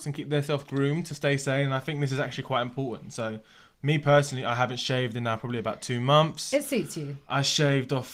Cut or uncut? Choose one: uncut